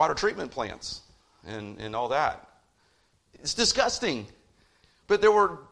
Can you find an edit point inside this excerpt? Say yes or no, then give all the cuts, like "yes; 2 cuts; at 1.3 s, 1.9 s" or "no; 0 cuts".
yes; 1 cut; at 3.1 s